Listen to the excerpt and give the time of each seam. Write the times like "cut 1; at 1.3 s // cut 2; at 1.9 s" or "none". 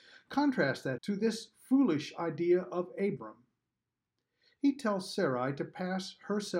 cut 1; at 1.0 s